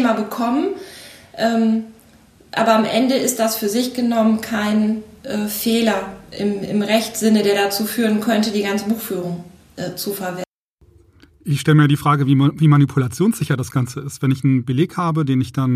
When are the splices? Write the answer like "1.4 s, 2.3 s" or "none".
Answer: none